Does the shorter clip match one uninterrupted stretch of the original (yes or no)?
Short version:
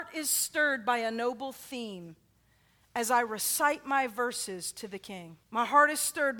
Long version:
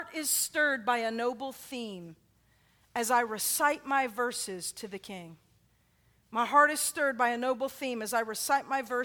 no